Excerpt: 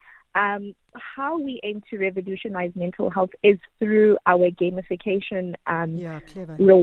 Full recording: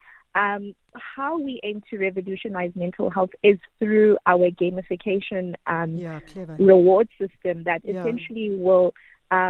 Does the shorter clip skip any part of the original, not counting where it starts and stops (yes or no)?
no